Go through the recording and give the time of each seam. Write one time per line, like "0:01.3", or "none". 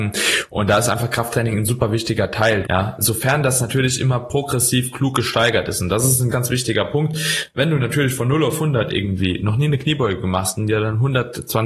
0:02.6
0:06.3